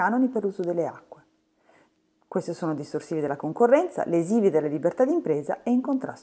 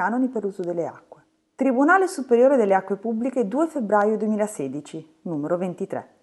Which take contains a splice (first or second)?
second